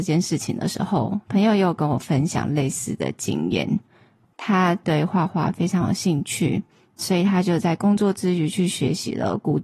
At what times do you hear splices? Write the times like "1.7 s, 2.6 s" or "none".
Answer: none